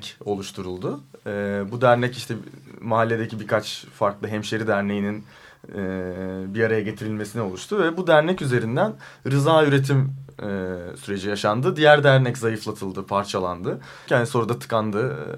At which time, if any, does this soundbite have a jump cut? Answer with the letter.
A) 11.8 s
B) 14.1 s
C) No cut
B